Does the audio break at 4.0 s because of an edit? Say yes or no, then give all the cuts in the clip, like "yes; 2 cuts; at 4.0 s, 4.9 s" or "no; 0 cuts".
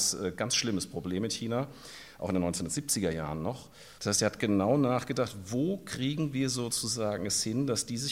yes; 1 cut; at 4.0 s